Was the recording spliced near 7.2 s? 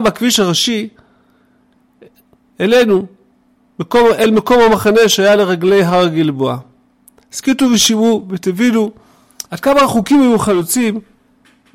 yes; 2 cuts; at 7.2 s, 9.5 s

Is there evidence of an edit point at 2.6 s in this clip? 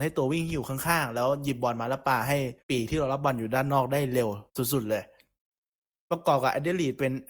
yes; 2 cuts; at 2.6 s, 4.5 s

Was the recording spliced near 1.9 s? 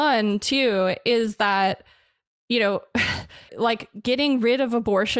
no; 1 cut; at 3.5 s

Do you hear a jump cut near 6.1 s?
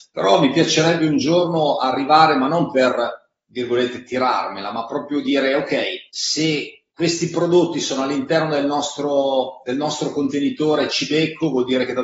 yes; 1 cut; at 6.1 s

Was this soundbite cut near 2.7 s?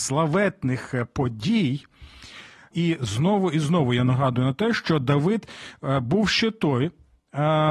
yes; 1 cut; at 2.7 s

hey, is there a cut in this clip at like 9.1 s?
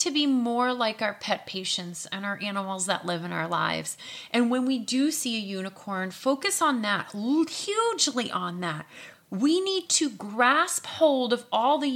yes; 1 cut; at 9.1 s

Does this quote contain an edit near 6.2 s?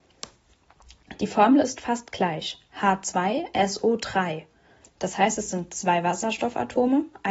no; 2 cuts; at 1.2 s, 4.8 s

